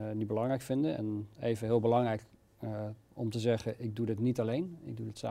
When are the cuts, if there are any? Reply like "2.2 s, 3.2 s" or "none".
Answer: none